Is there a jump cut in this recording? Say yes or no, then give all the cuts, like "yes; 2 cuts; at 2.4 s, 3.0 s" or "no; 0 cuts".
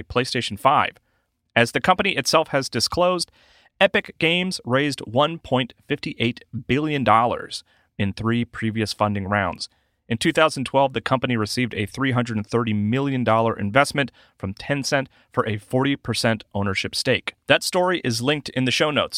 no; 0 cuts